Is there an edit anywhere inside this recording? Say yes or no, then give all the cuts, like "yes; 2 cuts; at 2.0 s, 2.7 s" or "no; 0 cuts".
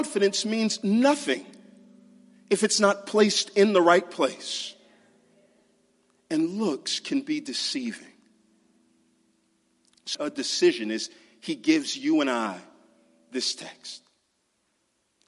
yes; 1 cut; at 10.1 s